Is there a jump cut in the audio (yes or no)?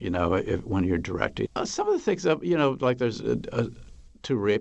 yes